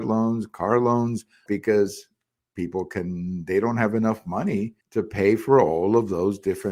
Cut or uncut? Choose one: cut